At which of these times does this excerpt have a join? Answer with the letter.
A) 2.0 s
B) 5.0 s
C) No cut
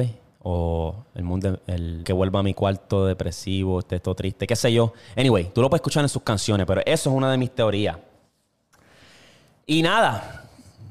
A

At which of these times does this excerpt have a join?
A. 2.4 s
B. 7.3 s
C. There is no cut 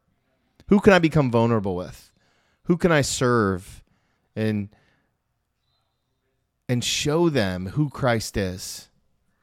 C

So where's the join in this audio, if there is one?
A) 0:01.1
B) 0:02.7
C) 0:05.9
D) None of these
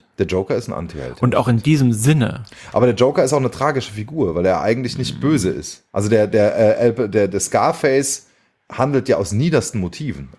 C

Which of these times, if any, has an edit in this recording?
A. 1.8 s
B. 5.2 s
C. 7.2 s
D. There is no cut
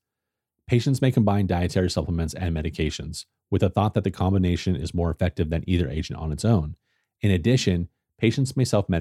D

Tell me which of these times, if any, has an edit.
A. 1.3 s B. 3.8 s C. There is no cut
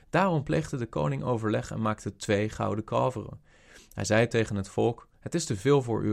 C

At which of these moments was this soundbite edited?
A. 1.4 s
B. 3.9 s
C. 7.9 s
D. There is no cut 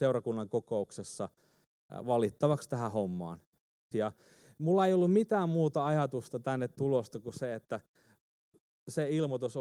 B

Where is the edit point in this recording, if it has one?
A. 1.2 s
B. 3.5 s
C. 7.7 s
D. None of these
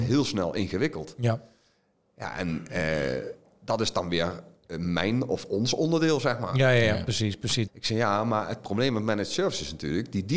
C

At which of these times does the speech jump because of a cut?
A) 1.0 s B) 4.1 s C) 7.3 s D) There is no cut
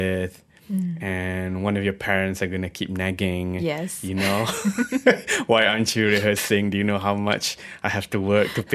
D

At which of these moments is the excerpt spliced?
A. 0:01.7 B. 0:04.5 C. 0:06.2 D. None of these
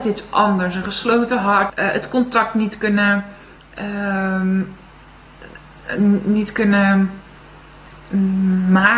A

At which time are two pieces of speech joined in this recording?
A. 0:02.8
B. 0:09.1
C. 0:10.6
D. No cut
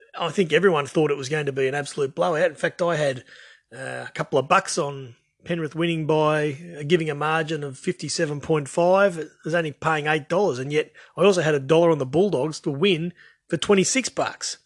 D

